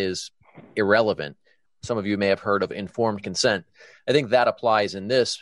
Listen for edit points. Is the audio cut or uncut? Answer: cut